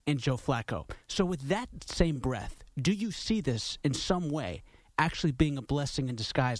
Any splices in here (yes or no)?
no